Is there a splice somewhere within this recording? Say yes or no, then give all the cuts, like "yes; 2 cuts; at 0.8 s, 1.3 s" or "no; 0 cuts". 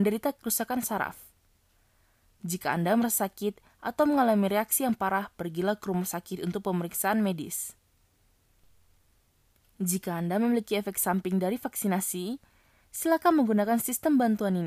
no; 0 cuts